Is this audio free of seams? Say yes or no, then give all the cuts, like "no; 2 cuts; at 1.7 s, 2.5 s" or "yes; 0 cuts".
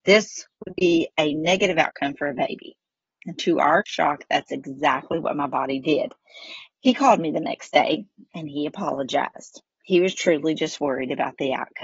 no; 2 cuts; at 3.0 s, 6.7 s